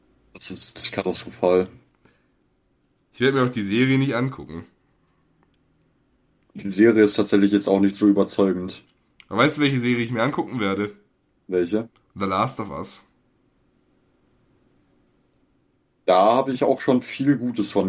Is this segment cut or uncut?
uncut